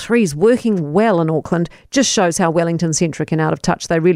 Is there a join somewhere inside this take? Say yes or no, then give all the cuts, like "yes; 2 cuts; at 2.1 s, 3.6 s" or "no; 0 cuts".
no; 0 cuts